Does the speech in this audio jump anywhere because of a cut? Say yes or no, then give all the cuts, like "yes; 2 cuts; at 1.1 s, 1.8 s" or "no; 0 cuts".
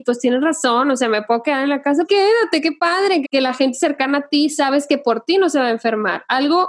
yes; 2 cuts; at 2.0 s, 3.2 s